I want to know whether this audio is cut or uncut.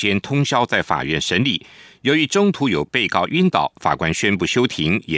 uncut